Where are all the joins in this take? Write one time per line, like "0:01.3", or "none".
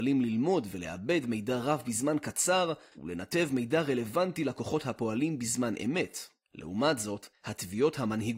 0:02.9